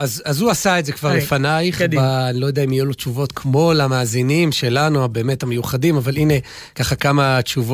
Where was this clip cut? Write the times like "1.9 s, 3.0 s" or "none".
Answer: none